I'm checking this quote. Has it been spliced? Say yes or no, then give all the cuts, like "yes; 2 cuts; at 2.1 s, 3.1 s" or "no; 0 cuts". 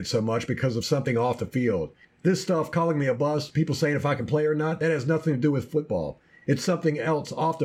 no; 0 cuts